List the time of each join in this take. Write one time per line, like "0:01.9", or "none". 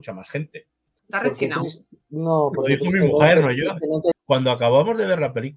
0:01.0
0:04.1

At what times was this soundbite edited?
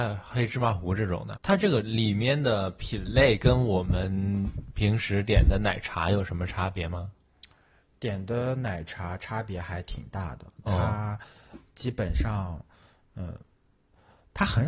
0:01.4

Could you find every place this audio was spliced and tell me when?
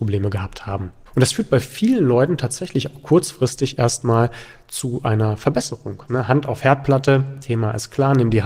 0:01.1
0:06.1

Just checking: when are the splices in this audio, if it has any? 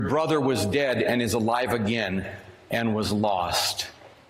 none

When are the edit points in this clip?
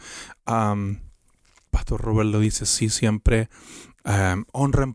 none

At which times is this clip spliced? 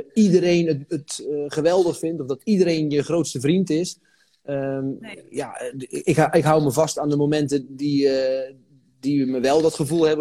none

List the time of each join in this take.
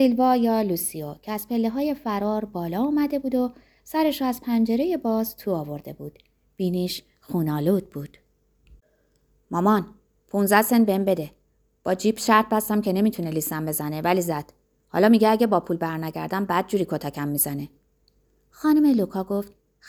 none

